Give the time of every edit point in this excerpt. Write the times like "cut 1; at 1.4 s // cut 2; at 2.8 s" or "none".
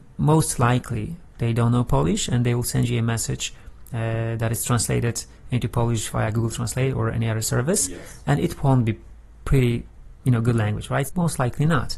cut 1; at 11.1 s